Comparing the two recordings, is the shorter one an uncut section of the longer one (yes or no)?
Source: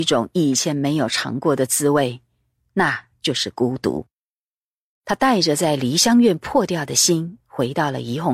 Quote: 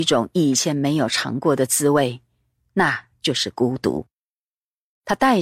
yes